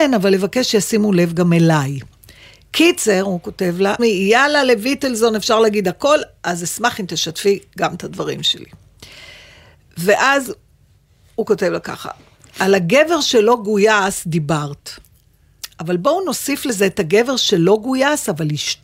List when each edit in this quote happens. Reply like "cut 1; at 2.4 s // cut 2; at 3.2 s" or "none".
cut 1; at 4.0 s

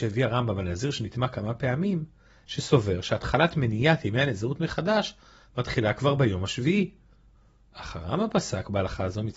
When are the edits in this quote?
cut 1; at 2.4 s

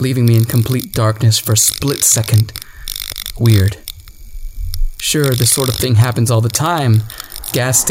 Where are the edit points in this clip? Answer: none

